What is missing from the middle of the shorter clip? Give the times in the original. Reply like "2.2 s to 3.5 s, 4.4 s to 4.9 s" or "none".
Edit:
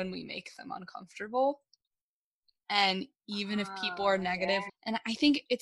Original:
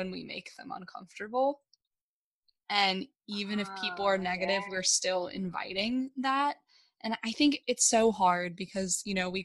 4.7 s to 6.9 s